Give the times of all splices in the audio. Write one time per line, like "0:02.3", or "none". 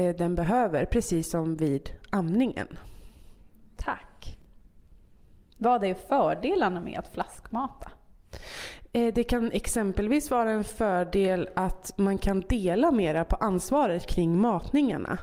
none